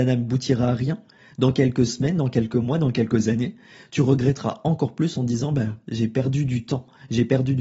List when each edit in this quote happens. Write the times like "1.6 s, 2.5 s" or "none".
none